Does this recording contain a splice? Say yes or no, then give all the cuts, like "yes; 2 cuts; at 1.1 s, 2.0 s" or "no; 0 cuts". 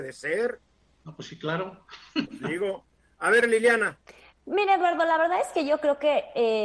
no; 0 cuts